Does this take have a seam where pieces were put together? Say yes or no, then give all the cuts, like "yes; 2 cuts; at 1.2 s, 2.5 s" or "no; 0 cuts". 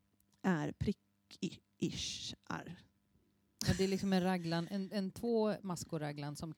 no; 0 cuts